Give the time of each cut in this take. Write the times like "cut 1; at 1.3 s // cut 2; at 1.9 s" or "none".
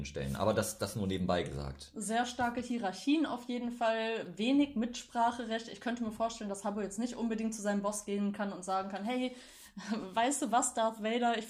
none

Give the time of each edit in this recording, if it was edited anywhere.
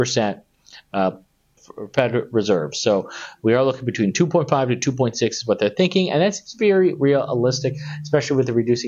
cut 1; at 1.6 s

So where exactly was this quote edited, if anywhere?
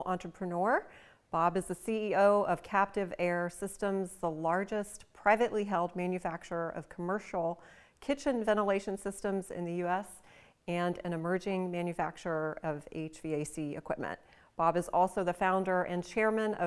none

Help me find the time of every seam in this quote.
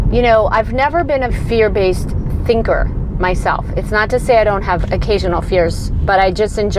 cut 1; at 1.3 s

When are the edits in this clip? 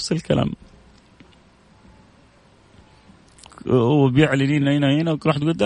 none

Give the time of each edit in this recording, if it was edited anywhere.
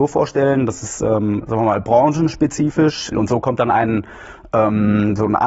cut 1; at 3.1 s

